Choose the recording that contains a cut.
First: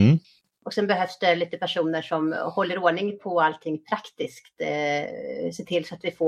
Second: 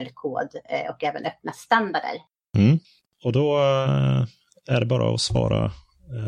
second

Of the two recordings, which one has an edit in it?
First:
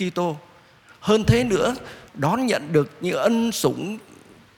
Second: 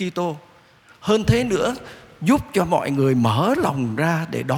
first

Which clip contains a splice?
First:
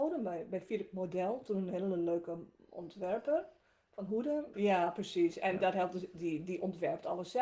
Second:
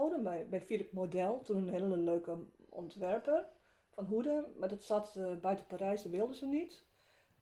first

